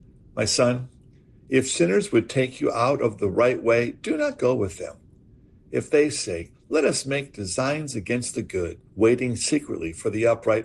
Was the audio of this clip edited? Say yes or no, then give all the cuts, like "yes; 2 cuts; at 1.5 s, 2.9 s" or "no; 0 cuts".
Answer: yes; 2 cuts; at 6.5 s, 8.9 s